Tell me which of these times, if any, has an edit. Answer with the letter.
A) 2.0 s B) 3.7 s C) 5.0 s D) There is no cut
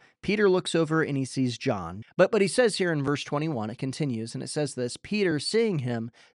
A